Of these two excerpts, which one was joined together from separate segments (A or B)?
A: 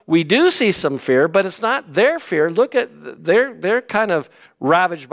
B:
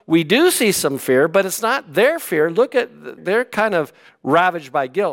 B